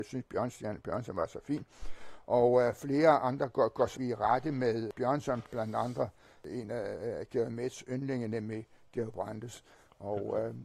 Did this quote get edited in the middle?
yes; 1 cut; at 3.9 s

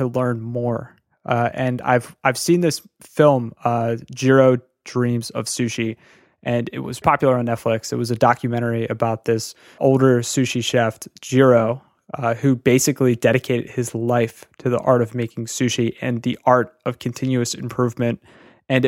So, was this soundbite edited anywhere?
yes; 2 cuts; at 7.0 s, 9.8 s

